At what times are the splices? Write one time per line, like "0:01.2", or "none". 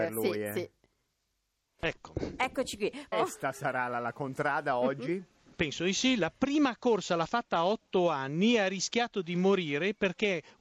0:03.1